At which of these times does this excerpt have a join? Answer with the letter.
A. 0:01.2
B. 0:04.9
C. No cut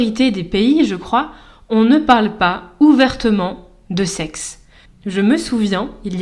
B